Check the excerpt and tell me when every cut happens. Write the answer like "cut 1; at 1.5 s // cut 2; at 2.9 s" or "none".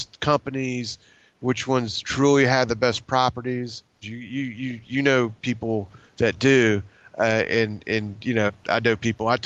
cut 1; at 4.0 s // cut 2; at 8.5 s